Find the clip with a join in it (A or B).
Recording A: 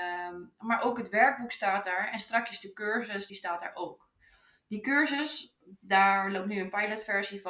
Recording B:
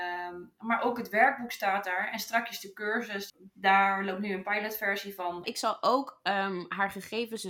B